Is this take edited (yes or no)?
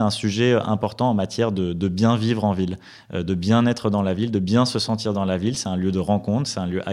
no